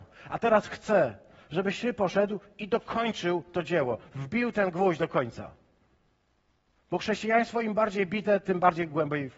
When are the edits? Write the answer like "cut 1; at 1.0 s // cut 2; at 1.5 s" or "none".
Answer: none